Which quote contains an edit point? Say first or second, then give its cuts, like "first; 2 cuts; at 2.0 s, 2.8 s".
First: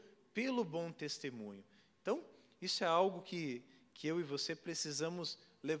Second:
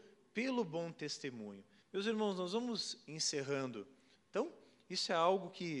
second; 2 cuts; at 1.8 s, 4.2 s